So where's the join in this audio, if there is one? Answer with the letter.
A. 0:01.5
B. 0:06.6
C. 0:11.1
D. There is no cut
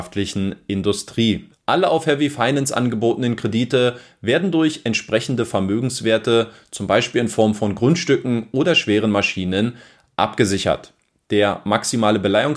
A